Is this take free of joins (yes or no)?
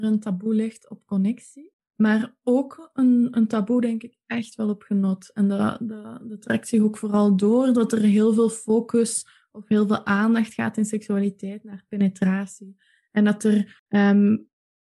yes